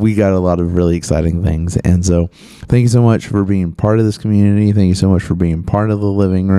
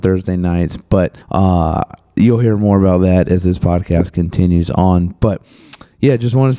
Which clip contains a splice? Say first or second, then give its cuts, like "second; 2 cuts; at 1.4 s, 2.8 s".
second; 1 cut; at 1.2 s